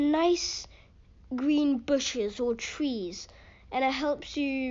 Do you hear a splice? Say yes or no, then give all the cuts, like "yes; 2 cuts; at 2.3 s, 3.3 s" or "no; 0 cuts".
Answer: no; 0 cuts